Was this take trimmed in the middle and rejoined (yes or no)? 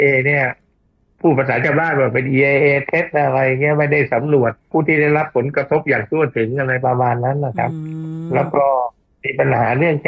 yes